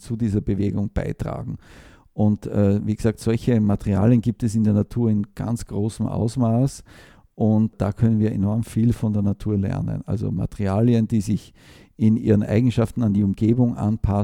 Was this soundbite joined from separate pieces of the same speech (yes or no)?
no